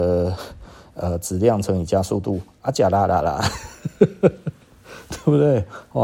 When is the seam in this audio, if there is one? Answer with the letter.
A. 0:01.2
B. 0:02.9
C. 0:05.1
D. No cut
D